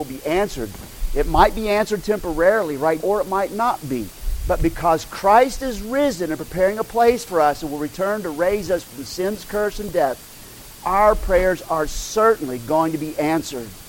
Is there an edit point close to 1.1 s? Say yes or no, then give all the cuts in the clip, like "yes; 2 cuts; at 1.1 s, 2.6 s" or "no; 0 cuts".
no; 1 cut; at 3.0 s